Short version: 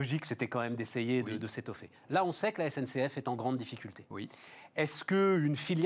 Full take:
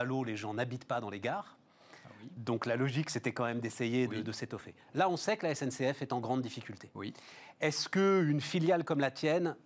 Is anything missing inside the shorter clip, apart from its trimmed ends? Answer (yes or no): no